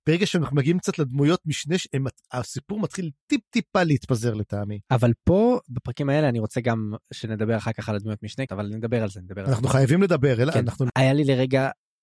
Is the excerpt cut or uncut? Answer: cut